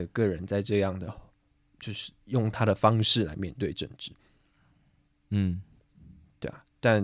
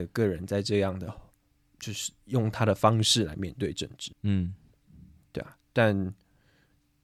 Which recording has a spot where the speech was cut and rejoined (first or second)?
second